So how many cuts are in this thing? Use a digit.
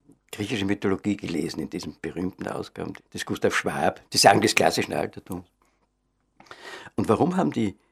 2